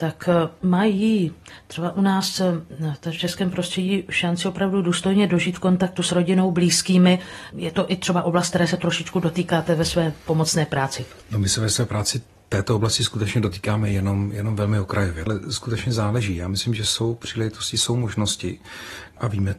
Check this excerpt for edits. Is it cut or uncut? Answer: uncut